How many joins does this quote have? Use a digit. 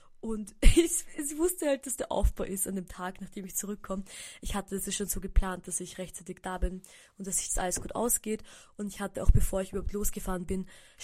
0